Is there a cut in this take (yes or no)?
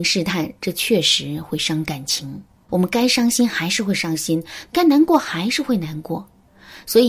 yes